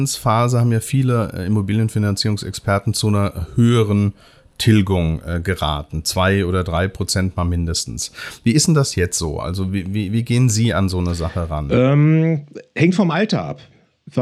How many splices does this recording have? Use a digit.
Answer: 0